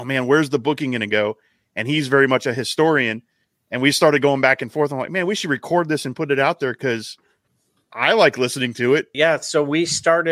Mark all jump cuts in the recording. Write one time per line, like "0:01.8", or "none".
0:09.1